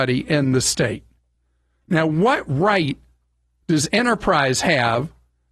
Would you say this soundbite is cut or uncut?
uncut